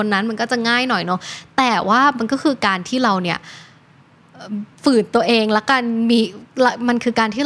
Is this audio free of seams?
no; 1 cut; at 4.7 s

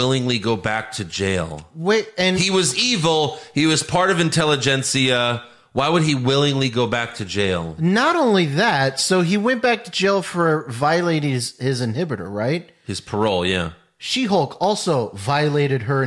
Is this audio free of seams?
yes; 0 cuts

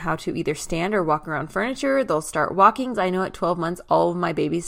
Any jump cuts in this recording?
yes; 1 cut; at 2.9 s

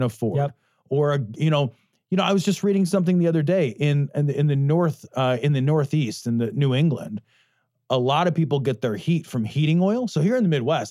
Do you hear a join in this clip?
no; 0 cuts

